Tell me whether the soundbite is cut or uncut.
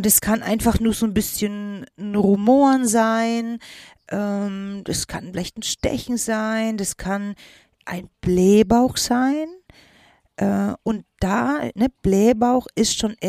uncut